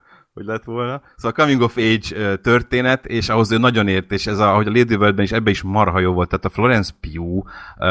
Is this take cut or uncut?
uncut